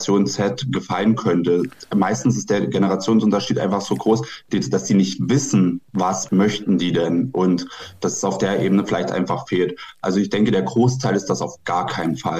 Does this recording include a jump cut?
yes; 1 cut; at 5.9 s

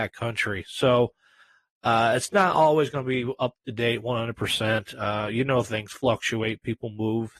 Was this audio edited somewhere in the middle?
no; 0 cuts

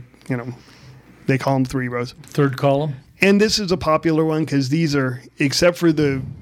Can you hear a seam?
yes; 1 cut; at 3.1 s

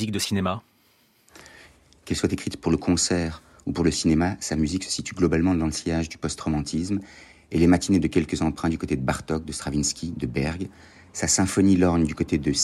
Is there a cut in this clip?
no; 0 cuts

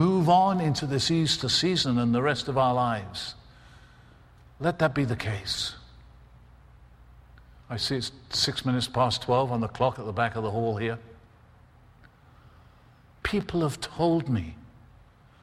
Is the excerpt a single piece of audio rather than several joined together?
no; 2 cuts; at 7.6 s, 13.2 s

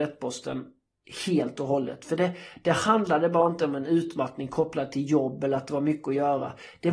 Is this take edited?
no; 0 cuts

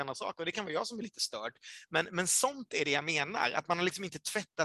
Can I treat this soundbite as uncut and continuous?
yes; 0 cuts

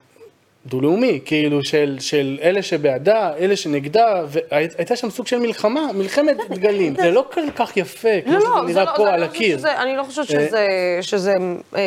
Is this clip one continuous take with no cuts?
no; 1 cut; at 7.0 s

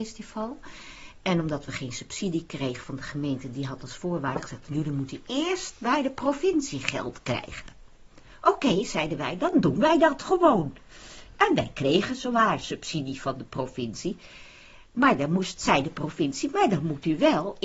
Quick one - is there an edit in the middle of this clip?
no; 0 cuts

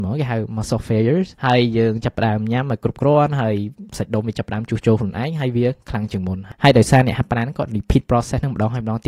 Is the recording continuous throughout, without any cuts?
no; 1 cut; at 1.3 s

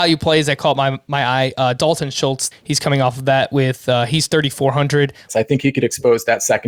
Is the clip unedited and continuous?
no; 2 cuts; at 2.5 s, 5.3 s

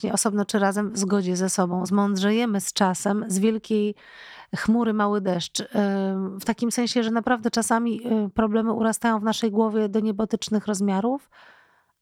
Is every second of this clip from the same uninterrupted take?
yes; 0 cuts

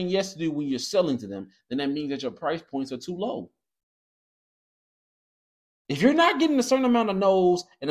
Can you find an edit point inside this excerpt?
no; 0 cuts

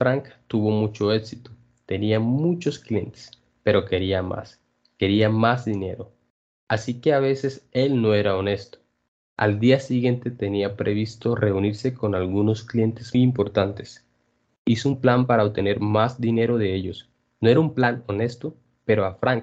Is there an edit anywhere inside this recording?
yes; 1 cut; at 13.1 s

